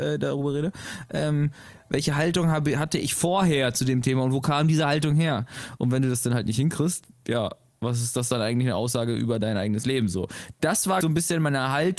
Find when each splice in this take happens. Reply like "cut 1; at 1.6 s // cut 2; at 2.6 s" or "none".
cut 1; at 5.8 s // cut 2; at 11.0 s